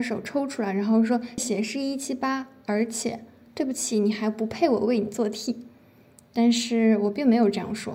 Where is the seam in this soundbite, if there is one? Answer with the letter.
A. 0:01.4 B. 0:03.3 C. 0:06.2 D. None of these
A